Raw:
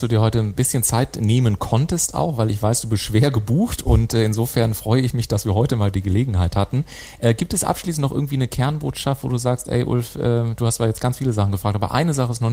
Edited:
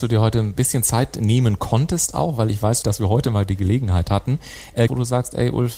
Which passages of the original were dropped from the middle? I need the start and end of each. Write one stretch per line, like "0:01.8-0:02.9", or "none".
0:02.8-0:05.3
0:07.3-0:09.2